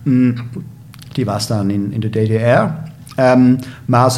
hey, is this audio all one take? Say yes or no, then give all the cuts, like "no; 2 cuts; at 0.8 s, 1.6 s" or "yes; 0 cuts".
yes; 0 cuts